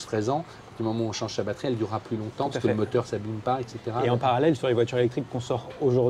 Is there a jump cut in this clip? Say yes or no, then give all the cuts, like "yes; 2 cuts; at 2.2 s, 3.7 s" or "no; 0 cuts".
no; 0 cuts